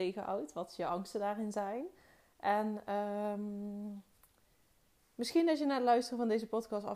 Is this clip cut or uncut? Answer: uncut